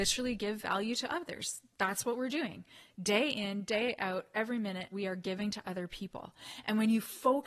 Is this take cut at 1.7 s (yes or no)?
no